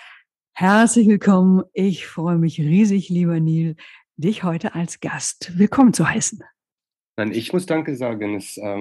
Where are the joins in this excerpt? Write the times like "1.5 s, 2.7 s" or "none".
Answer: none